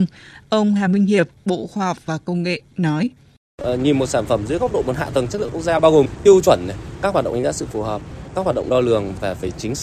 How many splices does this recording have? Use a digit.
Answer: 1